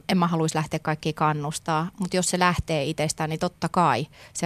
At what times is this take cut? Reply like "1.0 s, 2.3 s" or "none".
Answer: none